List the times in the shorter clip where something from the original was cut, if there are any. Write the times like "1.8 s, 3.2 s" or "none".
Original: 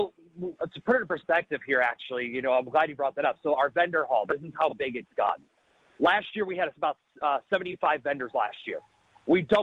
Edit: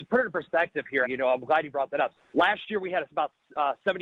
1.0 s, 2.2 s

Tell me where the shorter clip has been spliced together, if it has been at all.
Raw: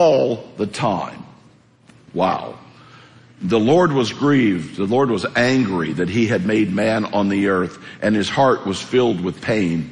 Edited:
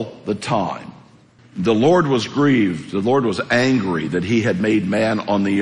1.4 s

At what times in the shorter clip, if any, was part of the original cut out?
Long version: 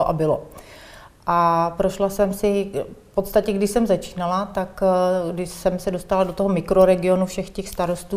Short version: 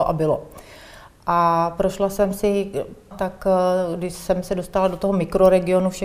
3.1 s

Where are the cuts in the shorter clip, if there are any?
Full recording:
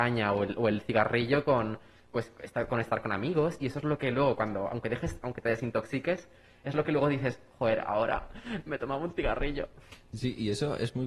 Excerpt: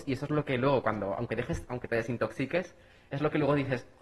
none

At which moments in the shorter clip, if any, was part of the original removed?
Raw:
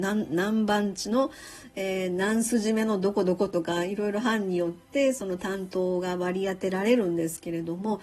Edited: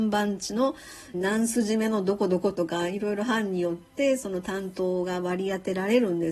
1.1 s

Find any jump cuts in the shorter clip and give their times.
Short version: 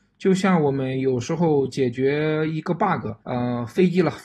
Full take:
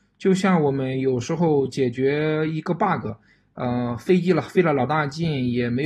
3.2 s

